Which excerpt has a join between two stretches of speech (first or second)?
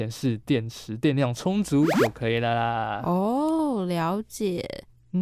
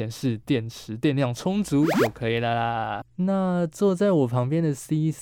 second